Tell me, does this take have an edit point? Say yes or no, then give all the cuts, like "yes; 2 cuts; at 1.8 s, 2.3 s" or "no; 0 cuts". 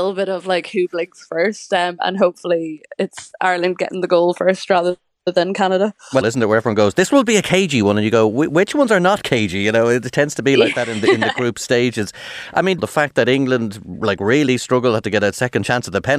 yes; 2 cuts; at 6.2 s, 12.8 s